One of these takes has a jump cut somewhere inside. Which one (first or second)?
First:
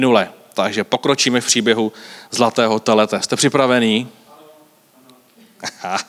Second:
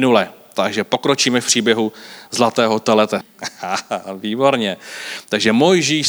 second